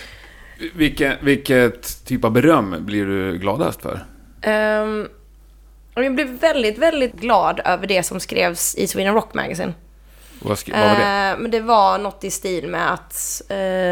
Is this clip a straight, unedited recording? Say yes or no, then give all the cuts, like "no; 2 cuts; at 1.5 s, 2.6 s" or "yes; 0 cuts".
no; 1 cut; at 7.1 s